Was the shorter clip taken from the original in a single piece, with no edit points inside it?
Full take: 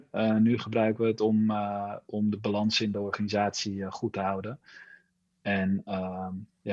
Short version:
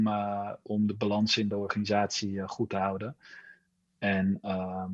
yes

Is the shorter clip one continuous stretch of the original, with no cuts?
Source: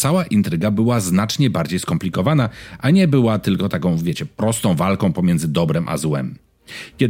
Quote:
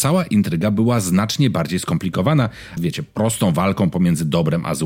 no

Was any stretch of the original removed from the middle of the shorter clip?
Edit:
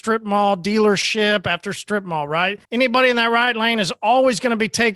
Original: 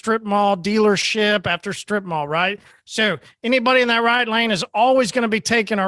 yes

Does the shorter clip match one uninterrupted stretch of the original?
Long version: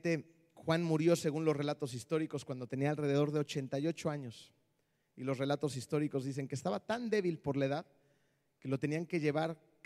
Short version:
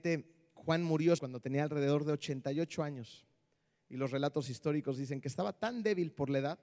no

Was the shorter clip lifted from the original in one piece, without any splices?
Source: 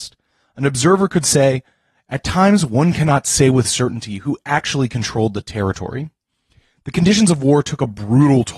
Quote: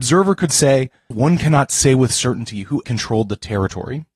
no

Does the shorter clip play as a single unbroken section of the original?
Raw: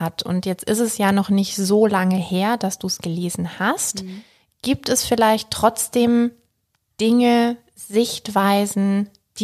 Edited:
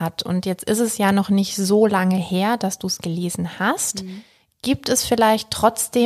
yes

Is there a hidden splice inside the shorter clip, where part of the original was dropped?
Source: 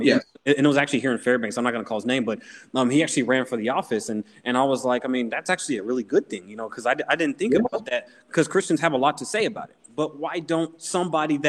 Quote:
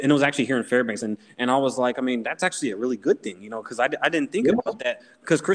yes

